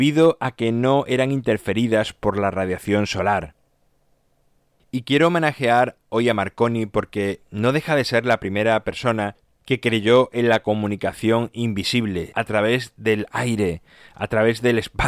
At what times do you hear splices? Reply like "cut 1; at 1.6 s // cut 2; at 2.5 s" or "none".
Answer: cut 1; at 12.3 s

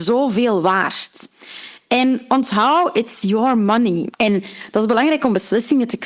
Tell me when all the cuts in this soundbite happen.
cut 1; at 4.1 s

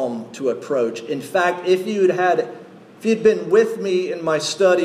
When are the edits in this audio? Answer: none

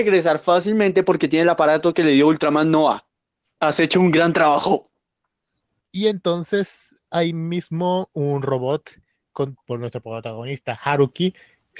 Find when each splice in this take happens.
cut 1; at 3.6 s // cut 2; at 5.8 s // cut 3; at 9.6 s

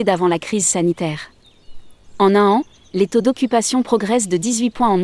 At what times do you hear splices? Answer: none

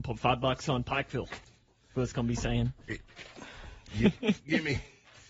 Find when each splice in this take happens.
none

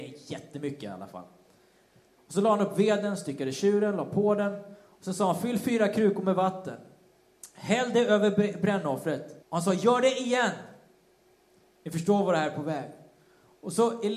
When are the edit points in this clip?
cut 1; at 9.4 s

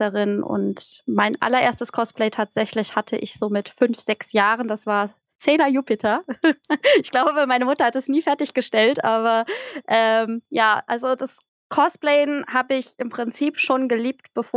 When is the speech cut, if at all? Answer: none

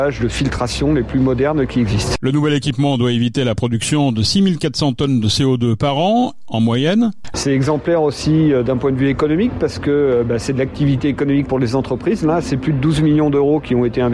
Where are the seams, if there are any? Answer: cut 1; at 7.3 s

